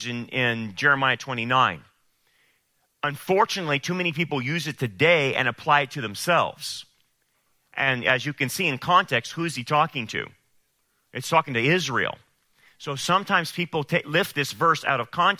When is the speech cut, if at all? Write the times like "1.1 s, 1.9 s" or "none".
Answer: none